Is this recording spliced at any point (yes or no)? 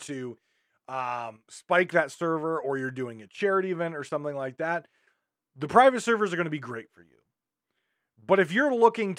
no